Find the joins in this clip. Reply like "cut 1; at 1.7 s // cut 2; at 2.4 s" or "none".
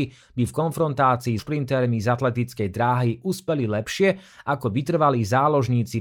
cut 1; at 1.4 s

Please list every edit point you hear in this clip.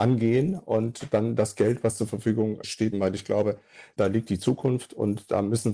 cut 1; at 2.9 s

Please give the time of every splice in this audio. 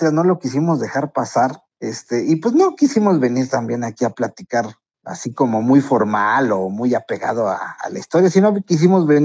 cut 1; at 1.7 s

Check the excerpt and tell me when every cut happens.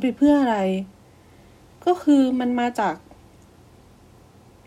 none

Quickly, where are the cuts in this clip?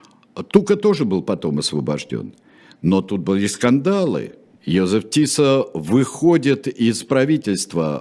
none

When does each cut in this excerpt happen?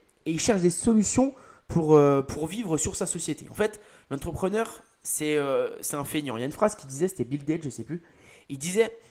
none

